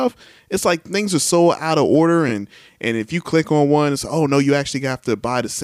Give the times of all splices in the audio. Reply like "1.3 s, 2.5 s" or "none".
none